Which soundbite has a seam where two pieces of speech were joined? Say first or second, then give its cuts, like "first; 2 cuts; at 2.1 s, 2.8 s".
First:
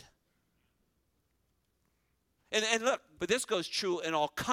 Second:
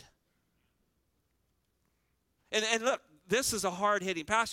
first; 1 cut; at 3.2 s